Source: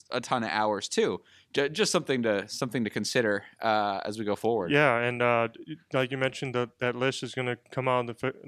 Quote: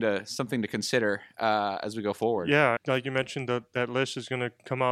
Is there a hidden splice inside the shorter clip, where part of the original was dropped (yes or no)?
yes